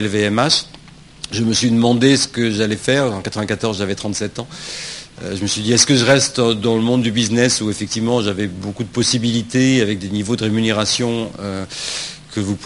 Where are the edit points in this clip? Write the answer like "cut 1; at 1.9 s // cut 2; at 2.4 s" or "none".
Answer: none